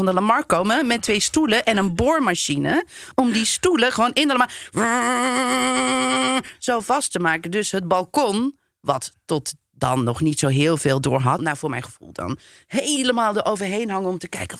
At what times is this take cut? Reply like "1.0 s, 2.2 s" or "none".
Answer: 11.4 s